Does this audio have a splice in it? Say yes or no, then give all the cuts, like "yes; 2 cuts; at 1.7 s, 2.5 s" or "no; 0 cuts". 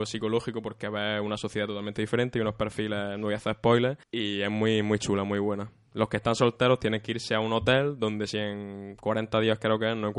yes; 1 cut; at 4.0 s